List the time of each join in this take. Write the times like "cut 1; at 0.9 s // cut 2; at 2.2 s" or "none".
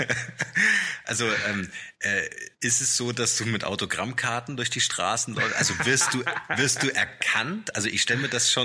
none